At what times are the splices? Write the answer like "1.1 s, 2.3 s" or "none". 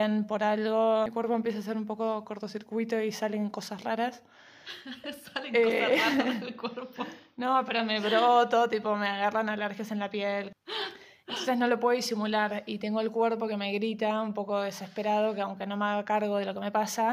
none